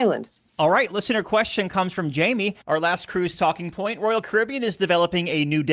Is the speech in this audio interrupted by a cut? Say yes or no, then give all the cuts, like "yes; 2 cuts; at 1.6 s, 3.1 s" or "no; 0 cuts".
yes; 1 cut; at 2.6 s